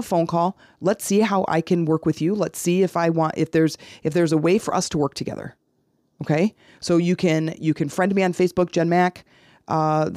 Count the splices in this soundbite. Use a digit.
0